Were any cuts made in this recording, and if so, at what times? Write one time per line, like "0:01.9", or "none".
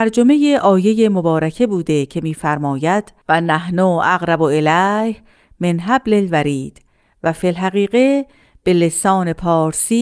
0:03.2

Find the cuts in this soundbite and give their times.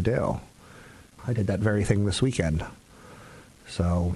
0:01.2

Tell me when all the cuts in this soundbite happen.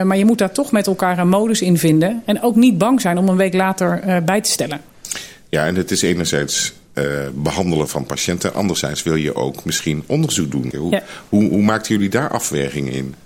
0:07.9
0:10.7

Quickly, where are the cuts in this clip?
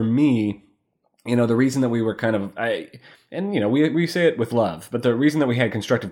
none

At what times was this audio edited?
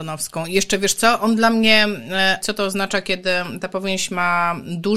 0:02.4

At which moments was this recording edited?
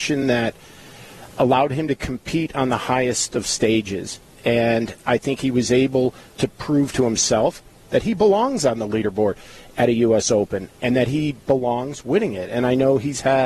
none

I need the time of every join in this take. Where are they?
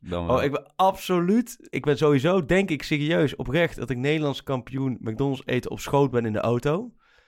0:01.7

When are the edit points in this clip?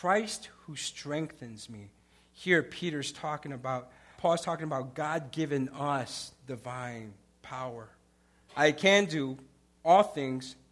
0:04.1
0:08.5

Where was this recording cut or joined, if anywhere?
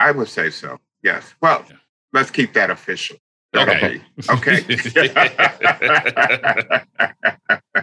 none

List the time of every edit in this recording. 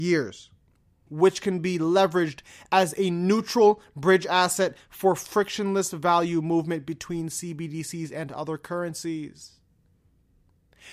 0:01.1

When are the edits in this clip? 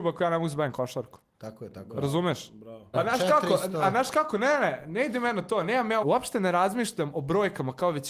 0:02.9
0:06.0

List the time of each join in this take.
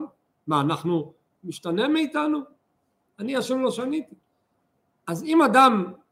0:01.3

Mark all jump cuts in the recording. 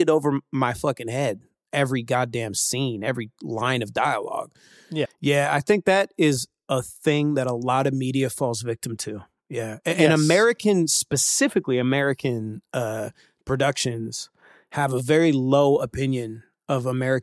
0:05.1

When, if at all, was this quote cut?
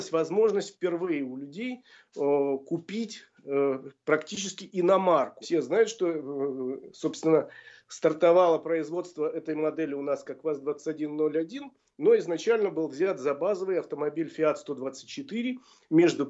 0:05.4

